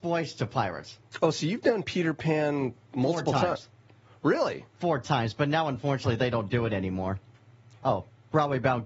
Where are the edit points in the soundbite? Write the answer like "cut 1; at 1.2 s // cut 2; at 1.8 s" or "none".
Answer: cut 1; at 7.7 s

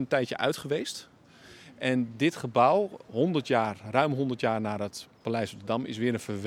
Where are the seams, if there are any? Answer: none

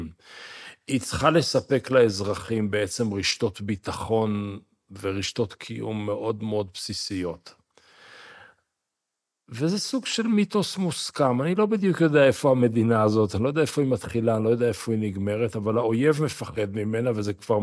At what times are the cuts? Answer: none

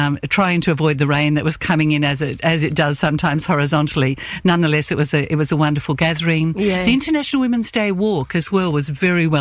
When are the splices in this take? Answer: none

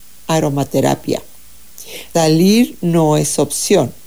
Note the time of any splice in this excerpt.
cut 1; at 2.1 s

